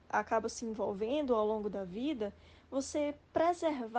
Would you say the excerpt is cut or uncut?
uncut